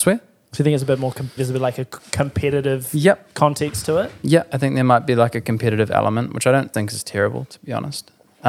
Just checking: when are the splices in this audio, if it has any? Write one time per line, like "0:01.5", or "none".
0:01.4
0:06.7